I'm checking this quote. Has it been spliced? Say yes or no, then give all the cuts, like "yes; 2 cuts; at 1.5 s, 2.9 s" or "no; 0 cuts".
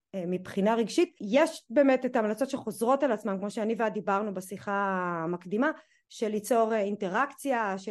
yes; 1 cut; at 6.0 s